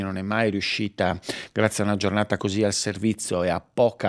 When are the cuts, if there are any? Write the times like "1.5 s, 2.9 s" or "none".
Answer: 2.4 s